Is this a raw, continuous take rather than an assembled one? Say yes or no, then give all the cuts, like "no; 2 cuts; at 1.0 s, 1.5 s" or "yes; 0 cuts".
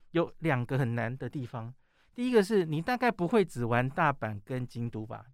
yes; 0 cuts